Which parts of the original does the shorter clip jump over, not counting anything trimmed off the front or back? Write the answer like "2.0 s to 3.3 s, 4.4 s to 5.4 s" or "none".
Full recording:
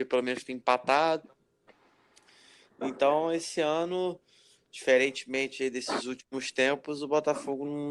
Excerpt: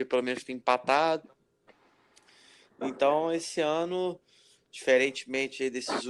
none